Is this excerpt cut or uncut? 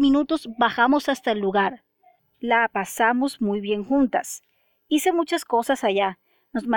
cut